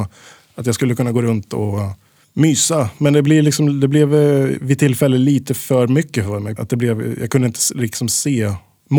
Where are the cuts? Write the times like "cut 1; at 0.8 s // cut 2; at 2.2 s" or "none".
cut 1; at 6.6 s